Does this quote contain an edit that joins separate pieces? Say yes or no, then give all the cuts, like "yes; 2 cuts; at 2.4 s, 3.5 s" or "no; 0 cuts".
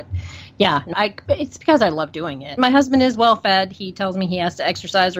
yes; 2 cuts; at 0.9 s, 2.6 s